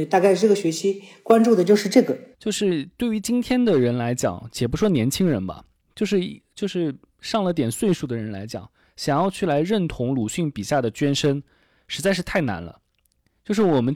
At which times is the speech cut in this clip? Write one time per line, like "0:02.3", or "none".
0:02.3